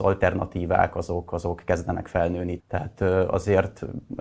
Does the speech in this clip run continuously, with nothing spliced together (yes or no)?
no